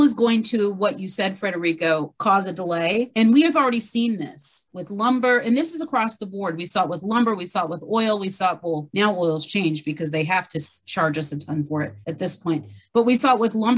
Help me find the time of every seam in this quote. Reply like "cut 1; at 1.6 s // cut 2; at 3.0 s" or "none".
none